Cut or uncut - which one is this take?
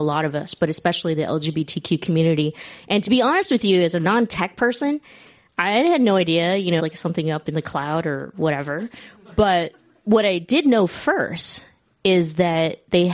cut